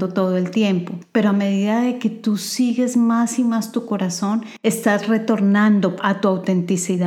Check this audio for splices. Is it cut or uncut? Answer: cut